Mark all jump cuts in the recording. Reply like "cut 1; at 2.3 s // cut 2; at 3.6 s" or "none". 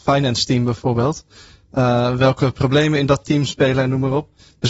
none

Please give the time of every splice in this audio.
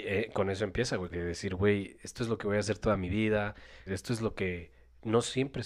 cut 1; at 1.1 s // cut 2; at 3.9 s

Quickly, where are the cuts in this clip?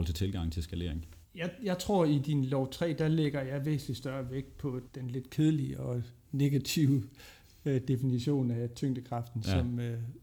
cut 1; at 4.9 s

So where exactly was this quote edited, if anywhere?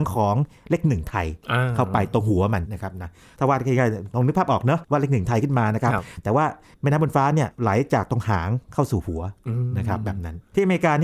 cut 1; at 2.6 s

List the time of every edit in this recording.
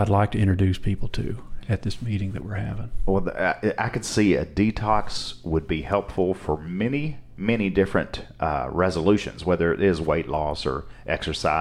none

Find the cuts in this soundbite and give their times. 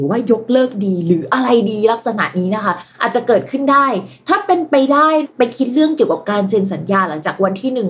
none

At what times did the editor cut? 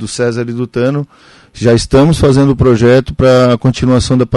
none

